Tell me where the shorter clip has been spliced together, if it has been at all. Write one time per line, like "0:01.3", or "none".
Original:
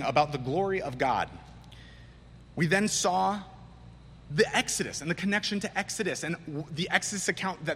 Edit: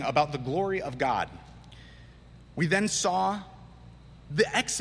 none